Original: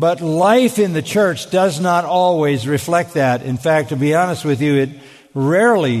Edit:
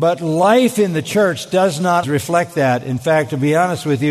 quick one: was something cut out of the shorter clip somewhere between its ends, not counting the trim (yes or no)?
yes